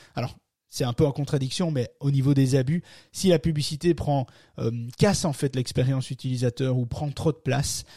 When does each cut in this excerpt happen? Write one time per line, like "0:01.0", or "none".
none